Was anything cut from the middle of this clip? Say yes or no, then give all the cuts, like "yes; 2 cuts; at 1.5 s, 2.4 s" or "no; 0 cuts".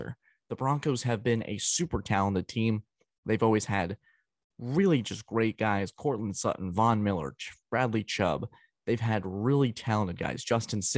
no; 0 cuts